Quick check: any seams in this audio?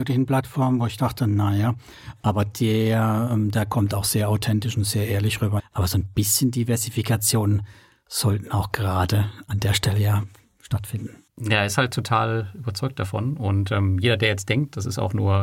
yes; 2 cuts; at 5.6 s, 11.3 s

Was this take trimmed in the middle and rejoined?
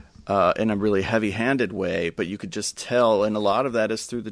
no; 0 cuts

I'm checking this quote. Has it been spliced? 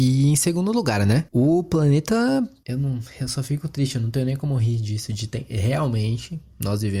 yes; 1 cut; at 2.6 s

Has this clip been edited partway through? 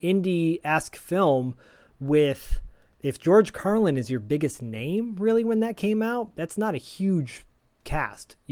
yes; 1 cut; at 6.3 s

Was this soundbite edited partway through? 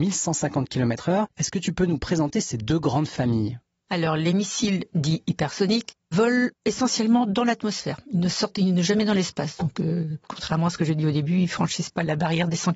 yes; 1 cut; at 1.3 s

